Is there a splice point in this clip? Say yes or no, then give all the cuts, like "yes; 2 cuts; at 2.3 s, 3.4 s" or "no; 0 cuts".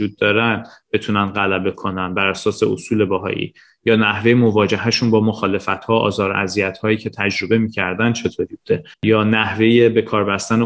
yes; 1 cut; at 8.9 s